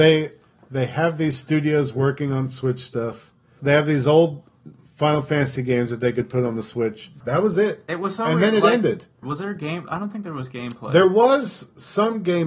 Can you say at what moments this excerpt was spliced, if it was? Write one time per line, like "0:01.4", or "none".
0:03.6
0:07.2
0:09.2